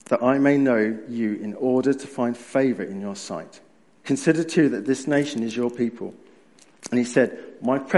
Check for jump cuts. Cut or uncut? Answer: uncut